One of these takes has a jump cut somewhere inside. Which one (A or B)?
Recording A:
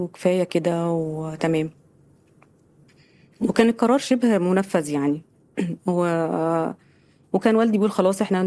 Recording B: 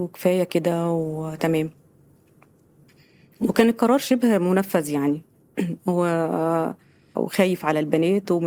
B